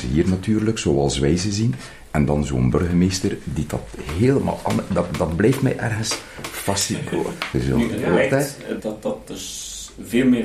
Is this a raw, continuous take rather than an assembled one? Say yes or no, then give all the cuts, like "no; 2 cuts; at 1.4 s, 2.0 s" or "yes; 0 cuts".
no; 2 cuts; at 7.5 s, 8.8 s